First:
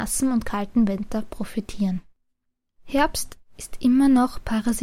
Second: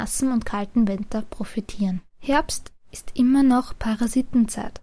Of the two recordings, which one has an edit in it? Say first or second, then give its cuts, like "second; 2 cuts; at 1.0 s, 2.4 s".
second; 1 cut; at 2.1 s